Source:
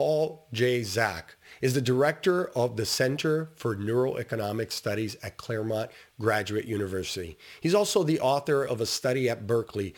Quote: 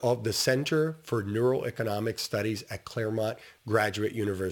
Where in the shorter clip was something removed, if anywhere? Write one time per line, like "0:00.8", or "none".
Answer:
none

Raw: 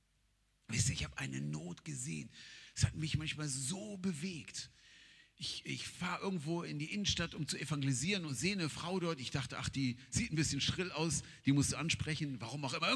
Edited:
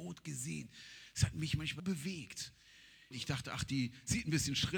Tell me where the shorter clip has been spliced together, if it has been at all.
0:01.8
0:03.1

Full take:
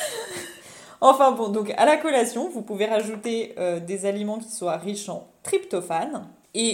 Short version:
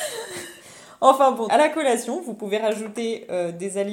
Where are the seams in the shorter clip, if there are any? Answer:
0:01.5

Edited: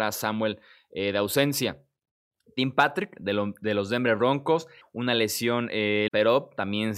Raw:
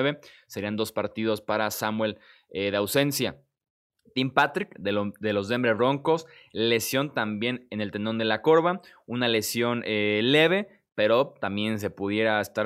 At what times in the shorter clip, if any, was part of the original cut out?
0:04.8
0:06.1

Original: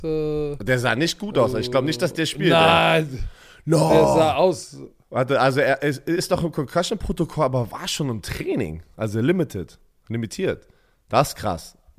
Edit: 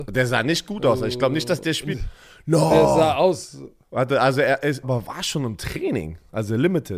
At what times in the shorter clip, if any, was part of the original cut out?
0:01.9
0:04.8

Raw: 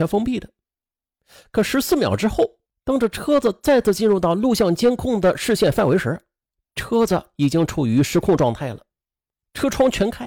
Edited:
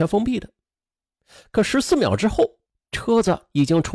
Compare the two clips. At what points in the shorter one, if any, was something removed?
0:02.7

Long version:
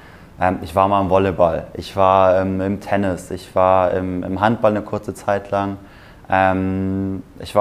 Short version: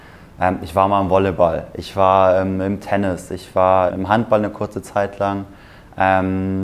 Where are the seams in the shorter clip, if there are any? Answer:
0:03.9

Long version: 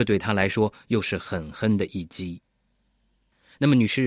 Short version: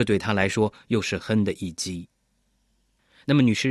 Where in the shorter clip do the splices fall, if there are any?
0:01.2

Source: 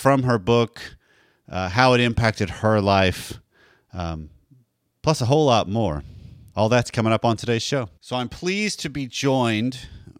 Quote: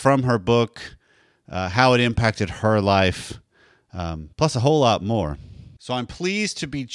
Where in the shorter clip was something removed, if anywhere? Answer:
0:04.3
0:05.8

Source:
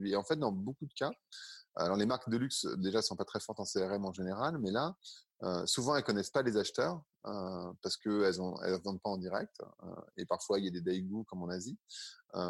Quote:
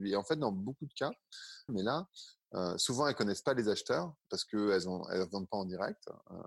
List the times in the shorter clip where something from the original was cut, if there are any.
0:01.7
0:04.3

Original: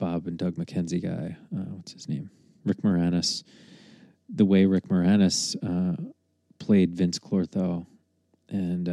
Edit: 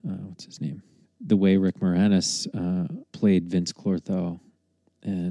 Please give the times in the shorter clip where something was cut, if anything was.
0:01.0
0:03.1

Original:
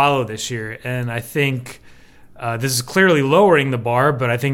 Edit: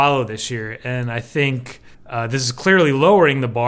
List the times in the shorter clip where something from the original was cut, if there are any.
0:01.9

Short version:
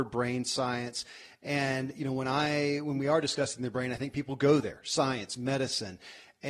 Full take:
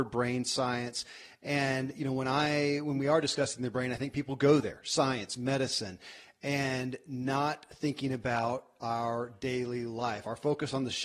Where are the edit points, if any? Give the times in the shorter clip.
none

